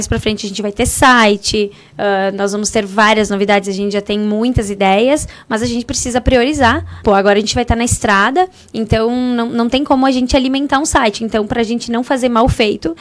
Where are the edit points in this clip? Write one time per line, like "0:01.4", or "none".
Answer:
0:07.0